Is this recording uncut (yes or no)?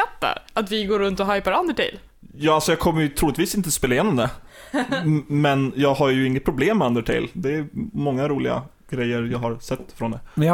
yes